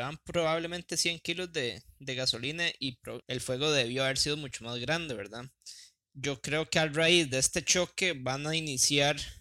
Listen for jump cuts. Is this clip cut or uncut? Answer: cut